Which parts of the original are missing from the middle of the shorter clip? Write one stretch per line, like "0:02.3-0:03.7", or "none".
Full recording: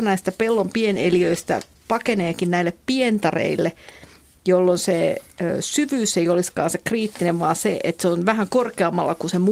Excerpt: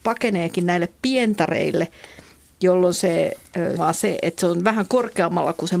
0:05.6-0:07.4